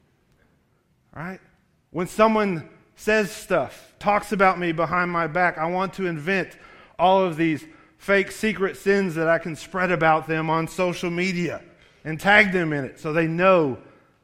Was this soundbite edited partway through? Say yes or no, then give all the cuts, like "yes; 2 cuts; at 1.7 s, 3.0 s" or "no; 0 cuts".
no; 0 cuts